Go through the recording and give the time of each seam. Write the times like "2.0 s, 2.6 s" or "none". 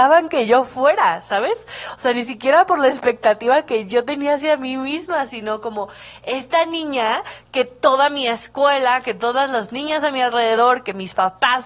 none